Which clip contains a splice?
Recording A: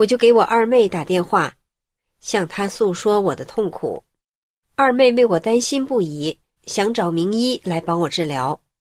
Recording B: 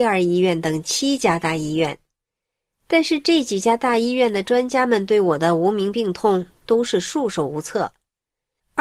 A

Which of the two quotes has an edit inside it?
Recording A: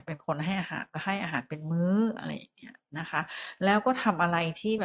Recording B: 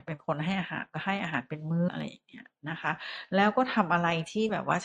B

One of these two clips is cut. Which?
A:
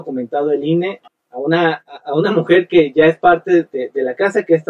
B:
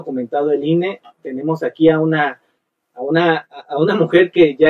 A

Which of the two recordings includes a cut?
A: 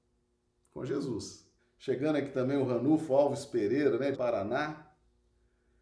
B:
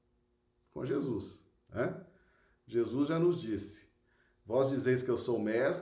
A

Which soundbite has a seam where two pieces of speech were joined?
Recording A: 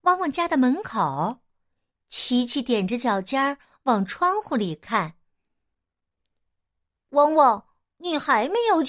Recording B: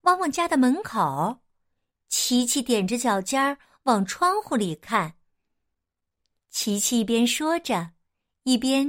B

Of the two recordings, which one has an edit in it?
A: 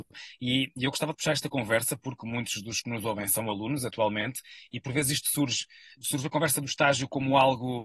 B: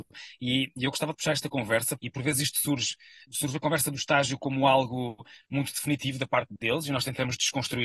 B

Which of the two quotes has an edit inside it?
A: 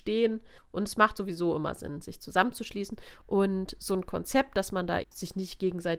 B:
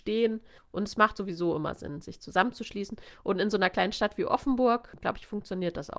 A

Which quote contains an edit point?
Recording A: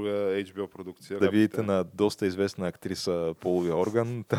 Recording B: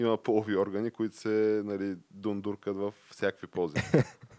A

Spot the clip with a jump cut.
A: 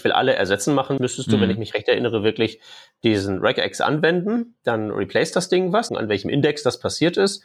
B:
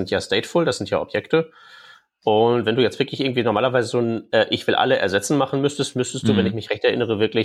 A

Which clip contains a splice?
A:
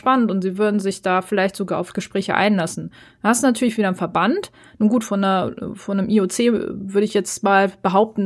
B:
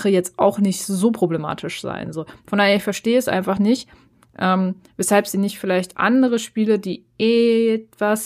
A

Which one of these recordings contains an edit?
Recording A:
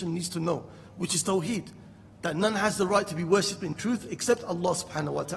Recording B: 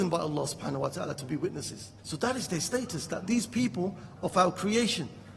B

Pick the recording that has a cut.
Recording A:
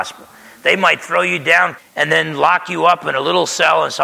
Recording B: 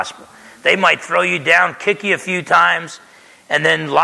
A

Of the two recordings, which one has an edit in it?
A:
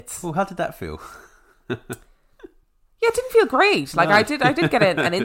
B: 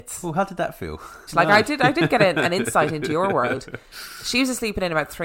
B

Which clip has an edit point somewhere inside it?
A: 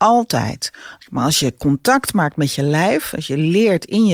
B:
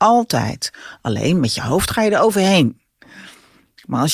A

